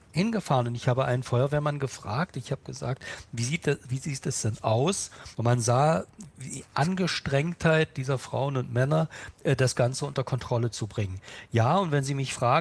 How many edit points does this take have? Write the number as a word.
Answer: two